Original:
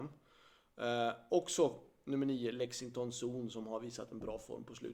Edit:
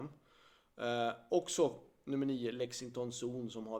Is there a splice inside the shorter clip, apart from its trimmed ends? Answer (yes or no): no